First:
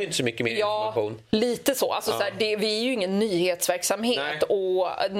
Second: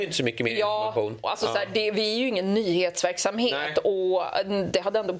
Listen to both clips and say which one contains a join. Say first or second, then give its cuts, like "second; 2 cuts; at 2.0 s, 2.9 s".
second; 1 cut; at 1.2 s